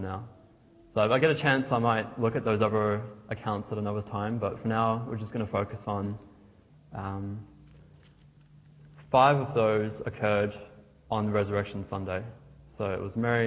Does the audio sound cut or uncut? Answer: cut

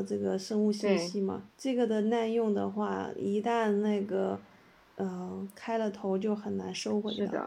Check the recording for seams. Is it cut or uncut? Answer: uncut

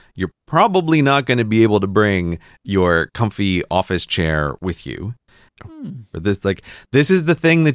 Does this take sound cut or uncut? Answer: cut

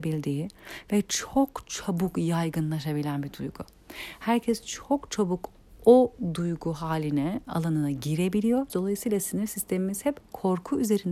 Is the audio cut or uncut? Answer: cut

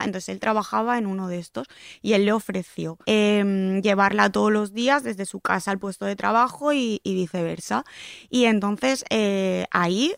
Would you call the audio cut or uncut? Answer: cut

